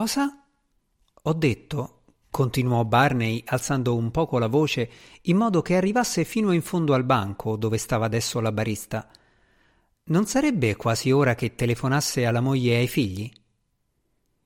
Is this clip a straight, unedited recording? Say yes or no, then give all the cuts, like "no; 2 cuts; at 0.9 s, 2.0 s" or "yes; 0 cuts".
yes; 0 cuts